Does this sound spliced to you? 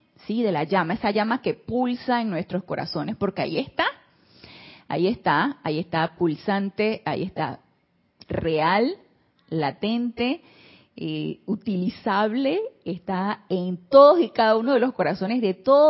no; 0 cuts

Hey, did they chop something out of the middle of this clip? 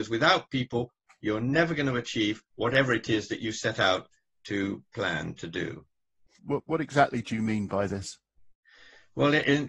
yes; 2 cuts; at 1.1 s, 6.4 s

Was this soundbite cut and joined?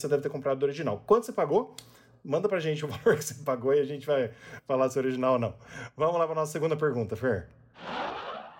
no; 0 cuts

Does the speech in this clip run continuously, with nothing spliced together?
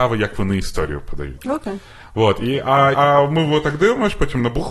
no; 2 cuts; at 1.4 s, 2.9 s

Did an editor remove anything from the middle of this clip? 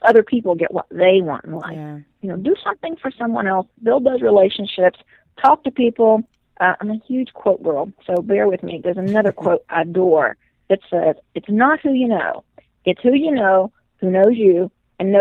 no; 0 cuts

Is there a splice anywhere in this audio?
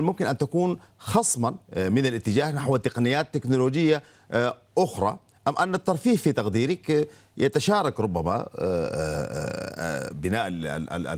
yes; 1 cut; at 1.7 s

